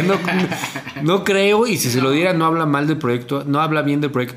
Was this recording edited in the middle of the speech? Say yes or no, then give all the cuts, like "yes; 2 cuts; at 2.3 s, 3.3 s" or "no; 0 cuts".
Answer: no; 0 cuts